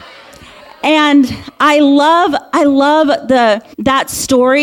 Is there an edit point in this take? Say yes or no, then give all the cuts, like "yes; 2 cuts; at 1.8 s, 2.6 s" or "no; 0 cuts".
yes; 1 cut; at 3.7 s